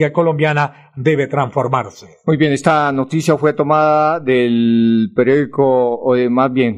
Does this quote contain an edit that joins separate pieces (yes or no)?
no